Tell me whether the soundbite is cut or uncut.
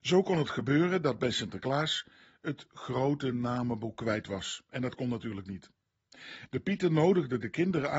cut